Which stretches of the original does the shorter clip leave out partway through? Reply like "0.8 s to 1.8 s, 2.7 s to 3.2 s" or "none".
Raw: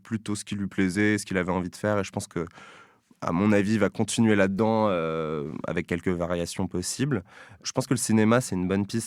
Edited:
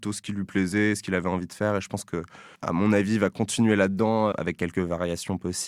2.8 s to 3.1 s, 4.9 s to 5.6 s